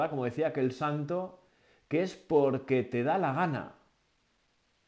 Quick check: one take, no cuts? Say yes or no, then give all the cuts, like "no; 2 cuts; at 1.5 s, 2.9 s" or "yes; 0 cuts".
yes; 0 cuts